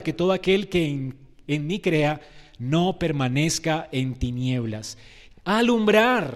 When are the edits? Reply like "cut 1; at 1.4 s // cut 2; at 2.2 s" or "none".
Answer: cut 1; at 5.3 s